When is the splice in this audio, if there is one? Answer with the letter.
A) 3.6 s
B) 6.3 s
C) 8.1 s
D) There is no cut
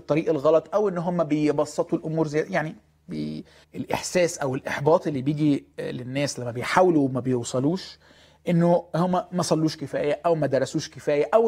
A